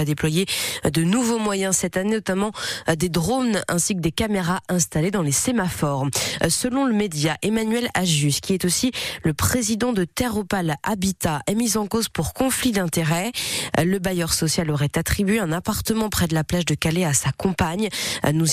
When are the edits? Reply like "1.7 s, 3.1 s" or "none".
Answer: 6.4 s

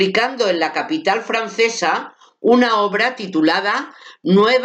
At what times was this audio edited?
none

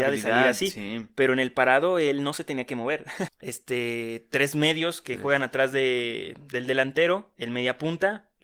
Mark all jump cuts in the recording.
3.3 s

